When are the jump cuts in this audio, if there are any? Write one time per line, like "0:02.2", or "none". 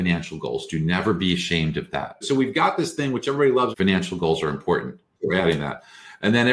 0:02.2
0:03.7
0:05.2